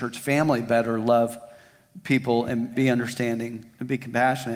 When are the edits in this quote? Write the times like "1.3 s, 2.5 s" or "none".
2.8 s